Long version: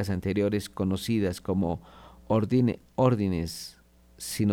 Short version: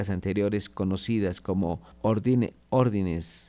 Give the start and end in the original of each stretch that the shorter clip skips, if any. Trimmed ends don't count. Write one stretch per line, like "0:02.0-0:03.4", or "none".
0:01.9-0:02.2